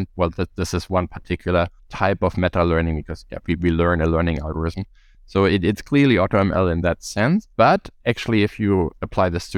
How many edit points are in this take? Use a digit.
0